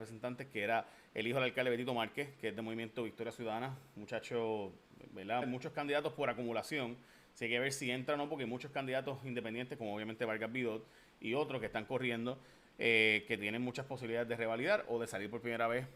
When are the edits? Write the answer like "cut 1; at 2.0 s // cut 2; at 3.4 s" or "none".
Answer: cut 1; at 5.4 s